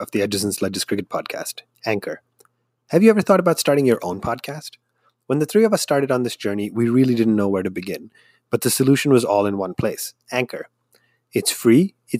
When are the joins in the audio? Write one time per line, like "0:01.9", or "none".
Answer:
none